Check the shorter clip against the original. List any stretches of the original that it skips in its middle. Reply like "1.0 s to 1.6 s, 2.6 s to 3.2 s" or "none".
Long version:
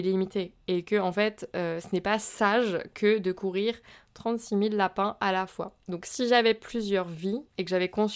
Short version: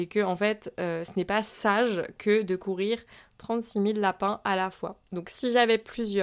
none